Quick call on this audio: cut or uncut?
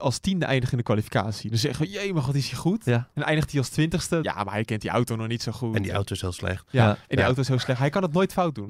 cut